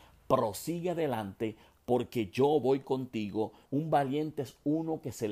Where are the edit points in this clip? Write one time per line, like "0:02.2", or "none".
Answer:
0:03.7